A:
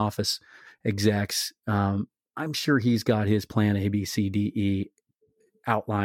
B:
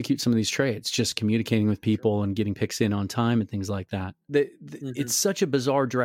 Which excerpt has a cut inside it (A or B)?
B